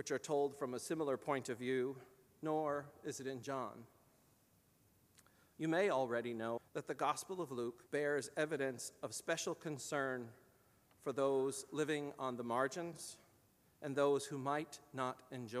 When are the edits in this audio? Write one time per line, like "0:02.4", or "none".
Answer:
0:06.6
0:07.9